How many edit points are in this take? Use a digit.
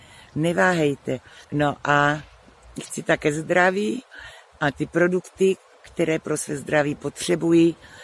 1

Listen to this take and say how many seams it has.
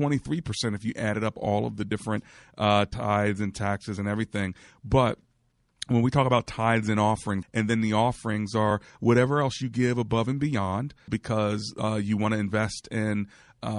2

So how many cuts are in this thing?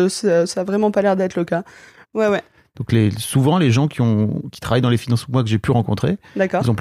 1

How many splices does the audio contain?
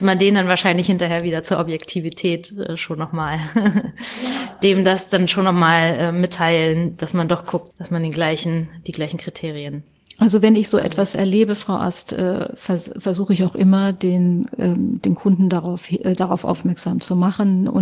1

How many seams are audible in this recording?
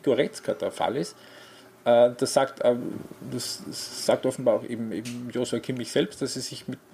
0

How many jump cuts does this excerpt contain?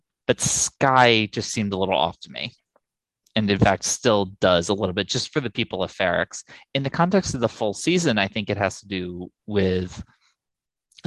0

